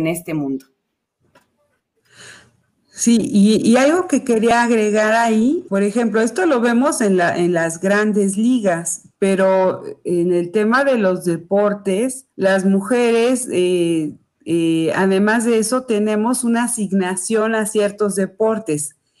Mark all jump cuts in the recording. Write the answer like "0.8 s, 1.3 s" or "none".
5.7 s, 12.3 s